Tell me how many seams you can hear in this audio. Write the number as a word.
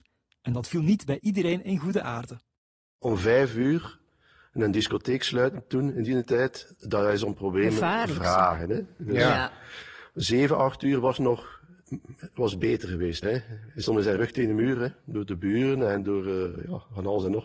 two